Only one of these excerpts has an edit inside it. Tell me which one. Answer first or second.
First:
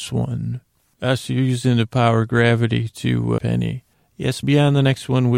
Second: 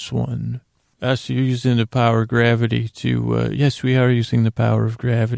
first